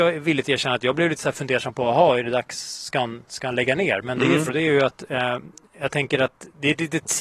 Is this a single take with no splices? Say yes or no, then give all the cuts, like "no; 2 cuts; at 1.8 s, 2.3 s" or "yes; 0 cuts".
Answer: no; 2 cuts; at 3.3 s, 4.5 s